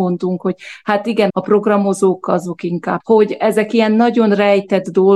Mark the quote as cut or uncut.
cut